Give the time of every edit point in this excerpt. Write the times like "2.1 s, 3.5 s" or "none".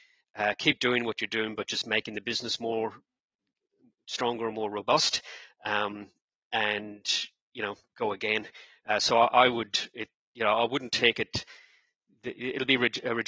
none